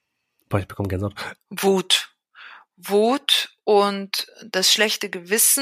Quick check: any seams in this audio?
yes; 1 cut; at 1.4 s

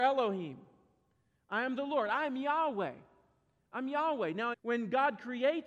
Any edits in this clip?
yes; 1 cut; at 4.5 s

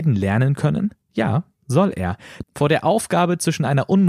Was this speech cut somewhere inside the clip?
yes; 2 cuts; at 1.0 s, 2.4 s

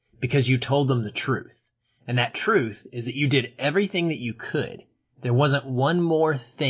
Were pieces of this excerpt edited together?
no; 0 cuts

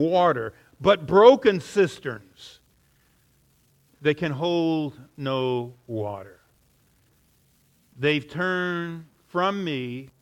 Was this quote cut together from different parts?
no; 0 cuts

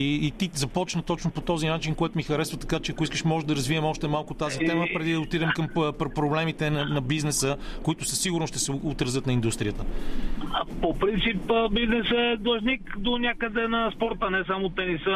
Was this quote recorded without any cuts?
yes; 0 cuts

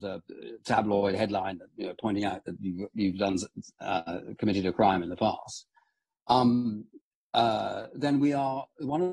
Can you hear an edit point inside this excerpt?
no; 0 cuts

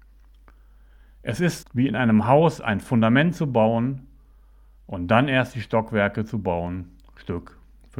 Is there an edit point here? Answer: yes; 1 cut; at 1.6 s

